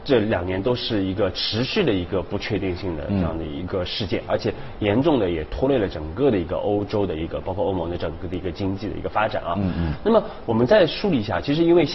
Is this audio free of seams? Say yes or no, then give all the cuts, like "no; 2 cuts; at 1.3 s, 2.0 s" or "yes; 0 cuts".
yes; 0 cuts